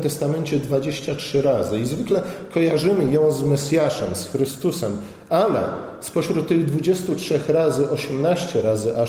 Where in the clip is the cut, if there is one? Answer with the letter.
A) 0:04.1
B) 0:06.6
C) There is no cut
C